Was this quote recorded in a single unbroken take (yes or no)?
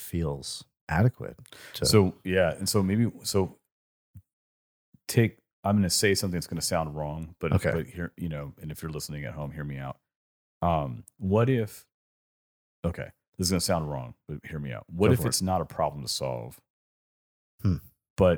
yes